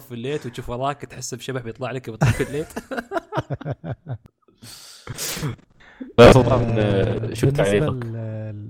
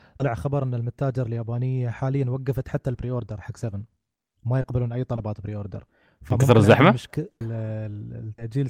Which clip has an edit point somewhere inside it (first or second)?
second